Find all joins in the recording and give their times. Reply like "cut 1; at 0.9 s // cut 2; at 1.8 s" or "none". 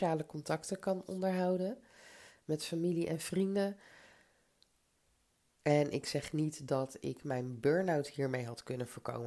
cut 1; at 5.6 s